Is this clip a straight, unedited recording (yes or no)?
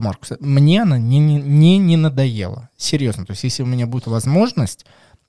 yes